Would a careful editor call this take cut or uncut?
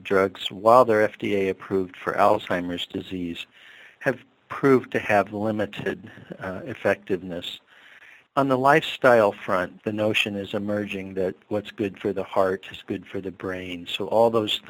uncut